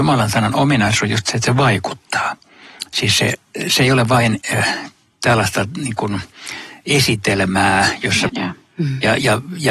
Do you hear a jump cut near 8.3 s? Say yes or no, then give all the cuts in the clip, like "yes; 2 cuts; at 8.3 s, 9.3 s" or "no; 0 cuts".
yes; 1 cut; at 8.3 s